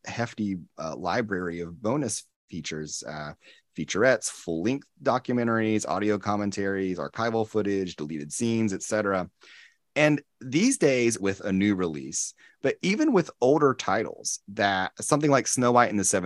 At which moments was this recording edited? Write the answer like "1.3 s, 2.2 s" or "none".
11.2 s